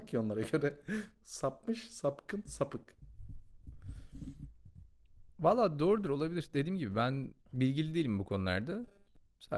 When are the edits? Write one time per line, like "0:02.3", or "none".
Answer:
none